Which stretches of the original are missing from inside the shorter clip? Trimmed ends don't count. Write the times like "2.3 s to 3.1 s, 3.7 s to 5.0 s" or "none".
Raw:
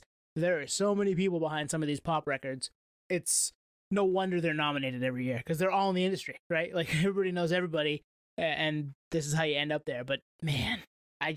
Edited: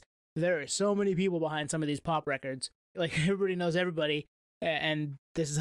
2.9 s to 6.7 s